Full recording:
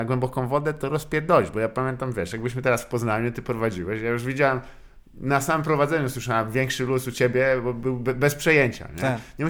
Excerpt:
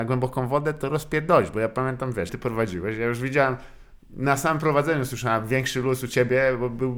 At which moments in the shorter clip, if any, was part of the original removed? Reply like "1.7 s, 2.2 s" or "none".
2.3 s